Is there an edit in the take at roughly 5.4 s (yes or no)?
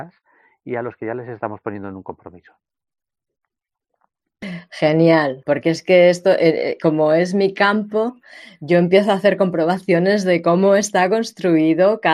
yes